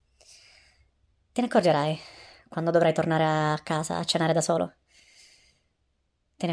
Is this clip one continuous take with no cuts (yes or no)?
yes